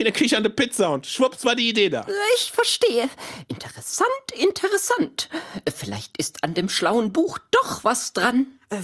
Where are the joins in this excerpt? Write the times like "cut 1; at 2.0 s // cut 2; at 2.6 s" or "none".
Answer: none